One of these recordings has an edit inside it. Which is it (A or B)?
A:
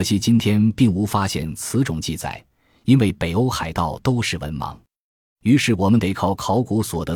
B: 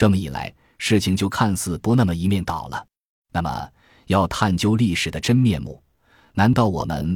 B